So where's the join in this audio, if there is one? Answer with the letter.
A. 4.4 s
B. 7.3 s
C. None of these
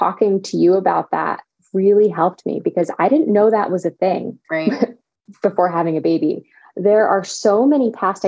A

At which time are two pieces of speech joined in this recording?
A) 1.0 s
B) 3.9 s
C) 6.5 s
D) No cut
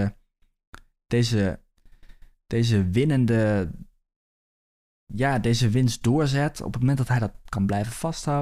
D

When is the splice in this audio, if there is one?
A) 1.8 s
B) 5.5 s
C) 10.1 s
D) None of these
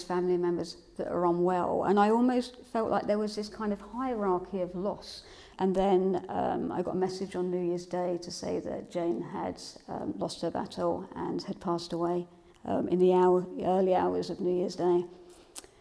B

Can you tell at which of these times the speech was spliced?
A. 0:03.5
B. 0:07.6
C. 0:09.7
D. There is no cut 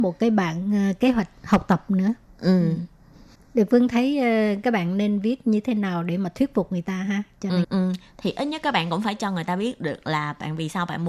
B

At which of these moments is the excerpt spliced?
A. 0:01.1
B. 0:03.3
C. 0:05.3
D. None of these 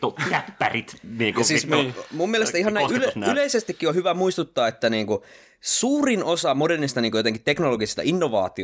D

